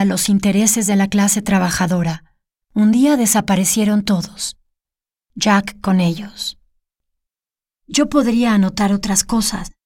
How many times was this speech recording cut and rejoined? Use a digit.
2